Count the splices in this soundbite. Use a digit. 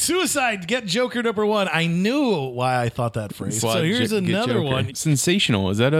2